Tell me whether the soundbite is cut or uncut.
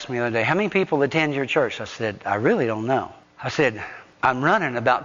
uncut